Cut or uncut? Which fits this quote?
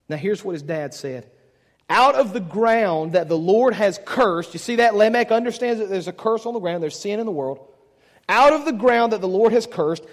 uncut